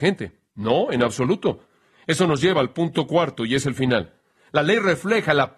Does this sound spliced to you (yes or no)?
no